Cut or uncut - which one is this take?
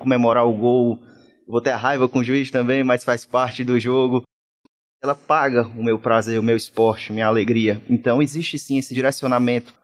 uncut